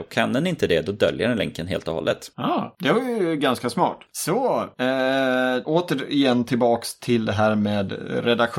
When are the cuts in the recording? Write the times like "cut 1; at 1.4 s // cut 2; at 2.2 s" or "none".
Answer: cut 1; at 4.1 s // cut 2; at 5.6 s